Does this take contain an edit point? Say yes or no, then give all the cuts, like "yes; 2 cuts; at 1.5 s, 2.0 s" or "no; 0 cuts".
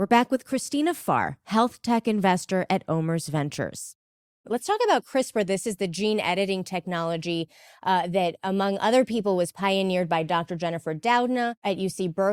no; 0 cuts